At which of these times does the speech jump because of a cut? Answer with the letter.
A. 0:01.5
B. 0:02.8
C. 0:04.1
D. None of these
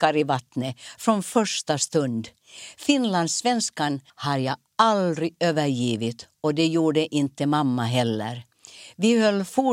C